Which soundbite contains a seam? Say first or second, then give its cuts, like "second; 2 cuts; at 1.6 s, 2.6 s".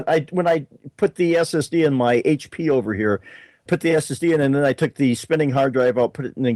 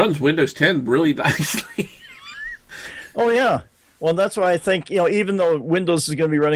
first; 1 cut; at 3.7 s